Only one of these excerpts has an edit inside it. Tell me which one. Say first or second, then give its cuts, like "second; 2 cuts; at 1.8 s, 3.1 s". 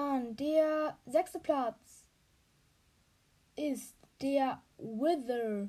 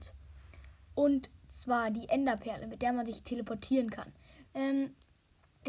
second; 1 cut; at 4.5 s